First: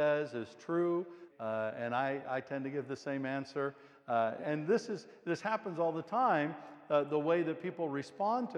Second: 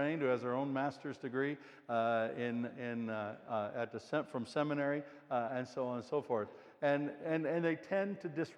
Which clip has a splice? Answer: first; 2 cuts; at 1.3 s, 4.4 s

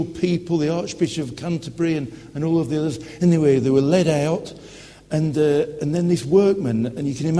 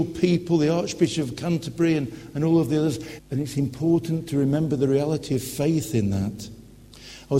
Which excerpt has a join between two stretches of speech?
second; 1 cut; at 3.2 s

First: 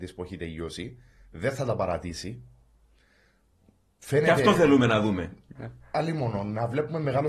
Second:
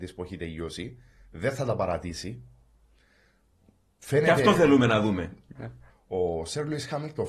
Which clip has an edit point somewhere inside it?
second; 1 cut; at 5.9 s

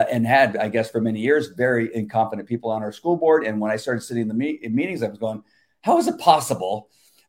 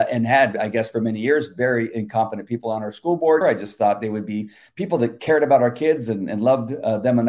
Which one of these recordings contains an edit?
second; 1 cut; at 3.4 s

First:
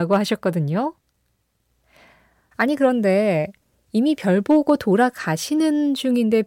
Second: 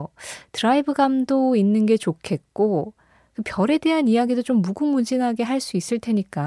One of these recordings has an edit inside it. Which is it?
first; 1 cut; at 2.5 s

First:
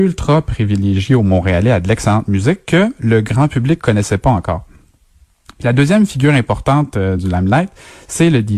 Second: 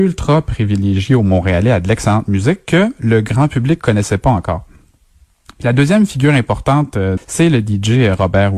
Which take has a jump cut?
second; 1 cut; at 7.2 s

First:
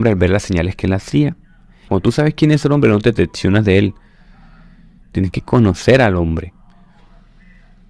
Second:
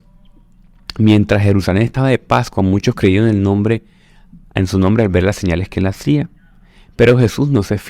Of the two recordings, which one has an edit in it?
first; 2 cuts; at 1.9 s, 5.0 s

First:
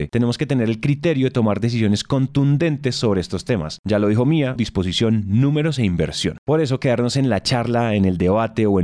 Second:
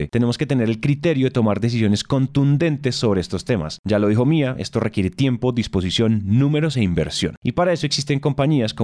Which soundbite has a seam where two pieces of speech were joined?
first; 2 cuts; at 4.6 s, 6.4 s

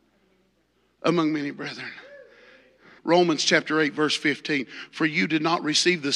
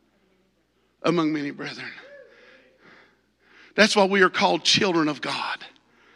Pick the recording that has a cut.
first; 1 cut; at 3.0 s

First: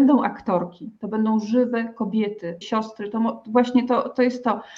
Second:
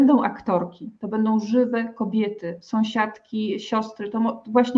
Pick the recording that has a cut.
first; 1 cut; at 2.6 s

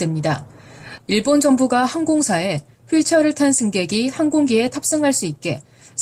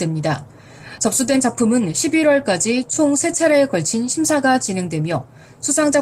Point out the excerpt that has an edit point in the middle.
first; 1 cut; at 1.0 s

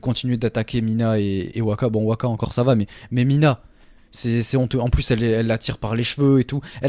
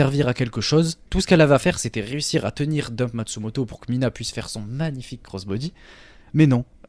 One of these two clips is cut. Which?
second; 1 cut; at 1.1 s

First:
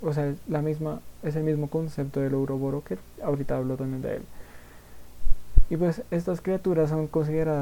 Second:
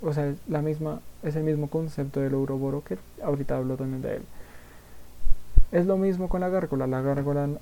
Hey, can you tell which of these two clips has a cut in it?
second; 1 cut; at 5.7 s

